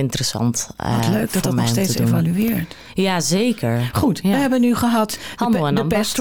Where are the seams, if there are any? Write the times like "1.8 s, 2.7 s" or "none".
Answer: none